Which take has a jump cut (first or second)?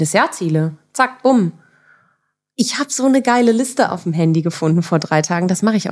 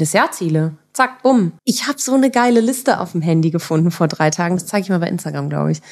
second